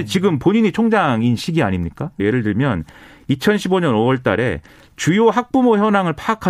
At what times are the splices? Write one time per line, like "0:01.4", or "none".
0:02.2